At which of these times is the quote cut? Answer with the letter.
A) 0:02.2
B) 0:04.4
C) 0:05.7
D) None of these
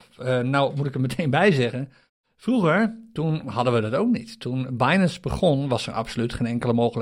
D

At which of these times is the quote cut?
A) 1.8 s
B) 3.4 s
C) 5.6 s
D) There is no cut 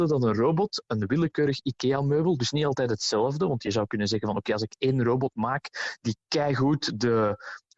D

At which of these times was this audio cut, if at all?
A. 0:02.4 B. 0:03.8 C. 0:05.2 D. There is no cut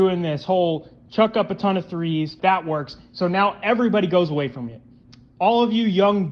A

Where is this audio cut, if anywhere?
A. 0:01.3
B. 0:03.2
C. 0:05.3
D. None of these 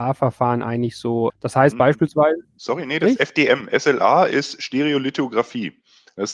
A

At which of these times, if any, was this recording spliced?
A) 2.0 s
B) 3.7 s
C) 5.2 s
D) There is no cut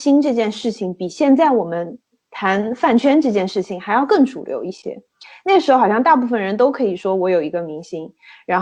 D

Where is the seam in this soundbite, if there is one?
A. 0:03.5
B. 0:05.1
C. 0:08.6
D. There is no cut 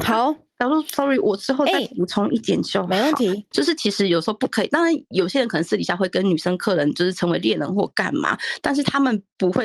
A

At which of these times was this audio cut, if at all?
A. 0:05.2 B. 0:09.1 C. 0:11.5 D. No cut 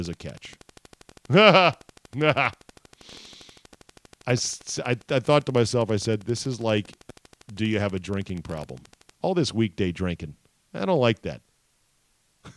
B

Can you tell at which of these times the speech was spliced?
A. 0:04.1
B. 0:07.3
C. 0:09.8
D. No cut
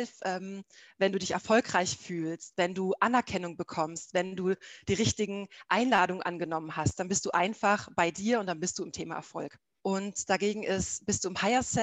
C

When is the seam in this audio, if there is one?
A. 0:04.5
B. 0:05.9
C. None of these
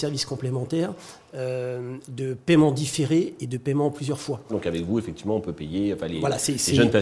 A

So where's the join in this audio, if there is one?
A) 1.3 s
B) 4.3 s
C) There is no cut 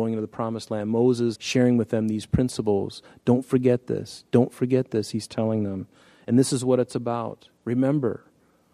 A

